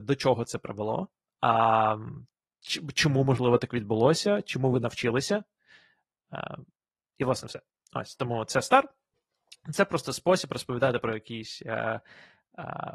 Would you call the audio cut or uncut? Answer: uncut